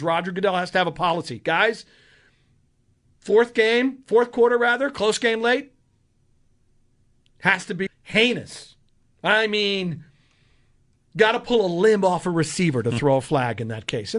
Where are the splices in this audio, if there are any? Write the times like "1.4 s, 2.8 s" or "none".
7.9 s

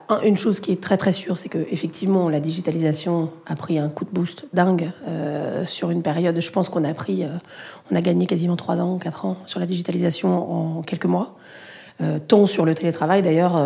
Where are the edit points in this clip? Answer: none

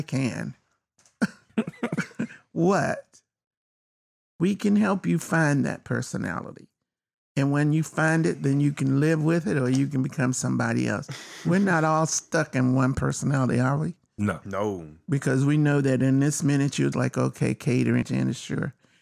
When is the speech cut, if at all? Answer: 16.9 s, 18.0 s

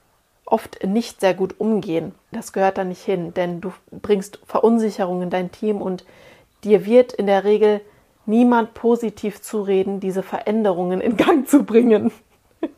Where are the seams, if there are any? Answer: 2.3 s

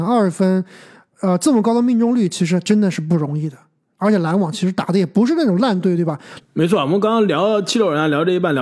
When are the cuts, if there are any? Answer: 6.4 s

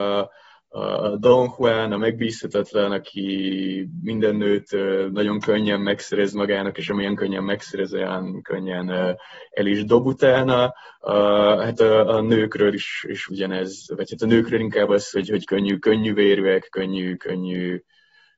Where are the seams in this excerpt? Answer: 13.3 s

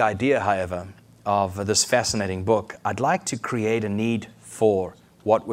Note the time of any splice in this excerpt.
none

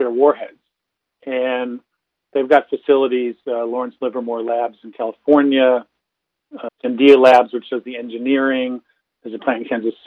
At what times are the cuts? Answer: 6.7 s

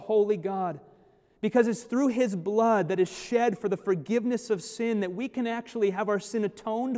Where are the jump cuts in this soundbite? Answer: none

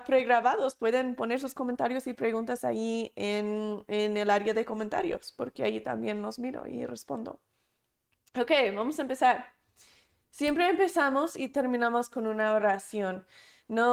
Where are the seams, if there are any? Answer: none

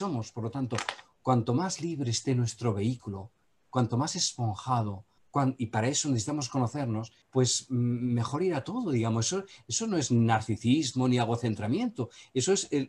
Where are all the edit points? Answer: 5.2 s, 7.2 s

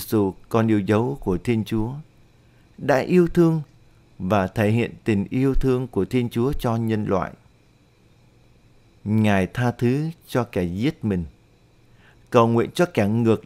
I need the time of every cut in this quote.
none

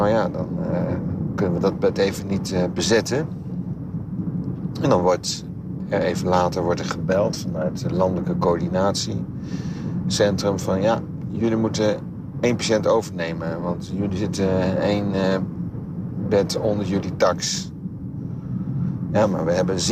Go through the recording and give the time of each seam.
none

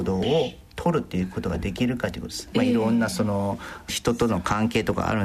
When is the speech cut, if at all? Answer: 2.5 s

